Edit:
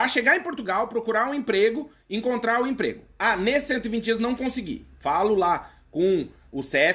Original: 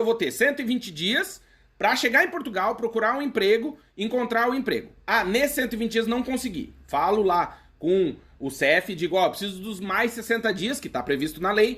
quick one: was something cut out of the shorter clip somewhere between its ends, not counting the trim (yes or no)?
no